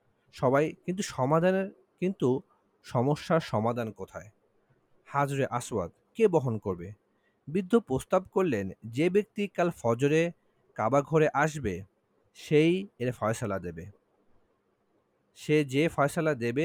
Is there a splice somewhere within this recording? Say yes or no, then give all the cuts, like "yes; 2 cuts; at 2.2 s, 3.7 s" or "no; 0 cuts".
no; 0 cuts